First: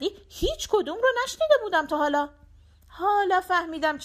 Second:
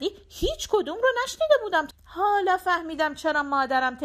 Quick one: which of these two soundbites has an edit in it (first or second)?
second